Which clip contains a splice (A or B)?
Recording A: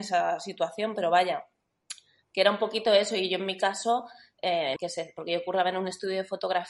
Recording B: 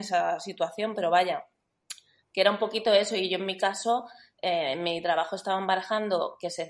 A